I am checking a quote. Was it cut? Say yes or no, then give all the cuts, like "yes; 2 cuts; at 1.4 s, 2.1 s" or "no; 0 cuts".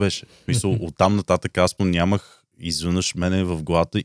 yes; 1 cut; at 1.8 s